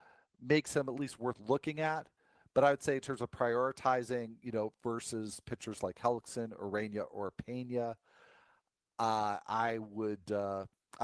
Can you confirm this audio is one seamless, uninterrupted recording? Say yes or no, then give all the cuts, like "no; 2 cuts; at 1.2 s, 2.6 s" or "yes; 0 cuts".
yes; 0 cuts